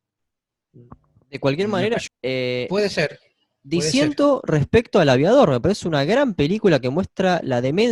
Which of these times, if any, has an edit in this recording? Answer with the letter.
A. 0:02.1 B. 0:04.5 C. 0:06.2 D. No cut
A